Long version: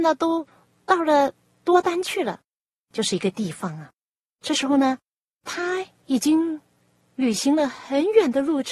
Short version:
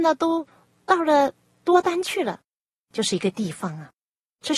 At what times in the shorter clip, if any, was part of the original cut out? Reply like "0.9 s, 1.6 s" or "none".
none